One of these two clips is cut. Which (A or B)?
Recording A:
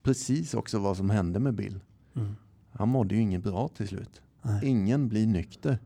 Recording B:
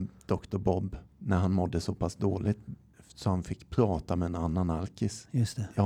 B